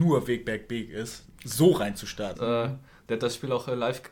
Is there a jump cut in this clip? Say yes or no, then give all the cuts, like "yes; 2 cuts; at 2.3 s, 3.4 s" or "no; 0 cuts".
yes; 1 cut; at 2.3 s